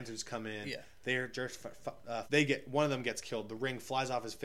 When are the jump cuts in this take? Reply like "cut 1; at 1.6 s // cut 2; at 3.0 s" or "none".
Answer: cut 1; at 2.3 s